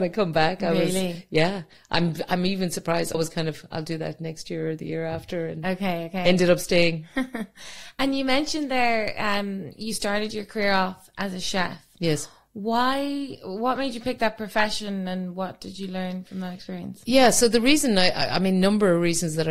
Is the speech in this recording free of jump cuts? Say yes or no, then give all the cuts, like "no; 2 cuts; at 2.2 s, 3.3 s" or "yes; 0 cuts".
no; 1 cut; at 3.1 s